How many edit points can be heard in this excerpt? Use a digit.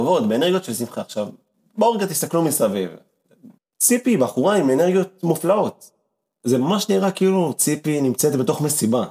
1